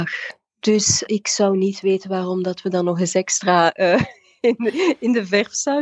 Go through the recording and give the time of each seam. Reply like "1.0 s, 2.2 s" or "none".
1.1 s

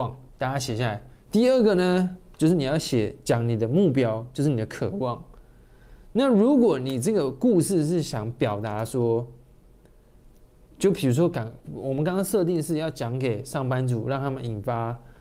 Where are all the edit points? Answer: 1.3 s

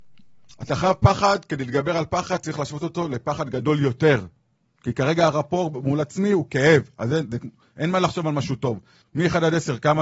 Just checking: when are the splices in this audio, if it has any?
9.0 s

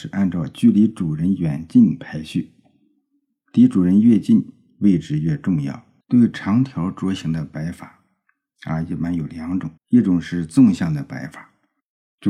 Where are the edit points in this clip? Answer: 6.0 s, 9.8 s

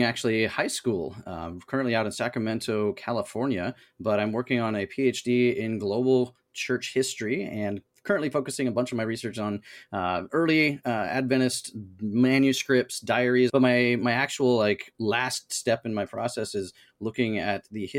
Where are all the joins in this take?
13.5 s

